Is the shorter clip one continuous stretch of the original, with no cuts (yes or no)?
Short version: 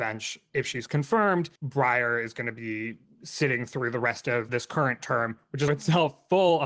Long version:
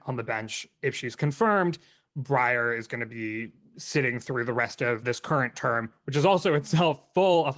no